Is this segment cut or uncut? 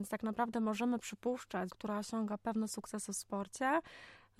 cut